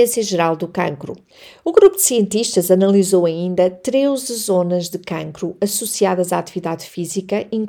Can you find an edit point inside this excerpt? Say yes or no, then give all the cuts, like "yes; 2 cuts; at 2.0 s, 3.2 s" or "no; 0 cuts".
no; 0 cuts